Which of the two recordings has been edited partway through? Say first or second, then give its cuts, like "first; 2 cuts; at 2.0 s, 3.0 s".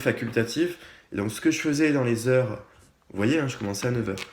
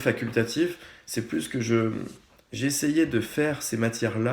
first; 1 cut; at 1.0 s